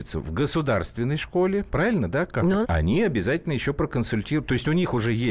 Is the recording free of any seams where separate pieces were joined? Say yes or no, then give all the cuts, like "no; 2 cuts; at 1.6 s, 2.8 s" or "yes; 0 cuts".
no; 1 cut; at 2.6 s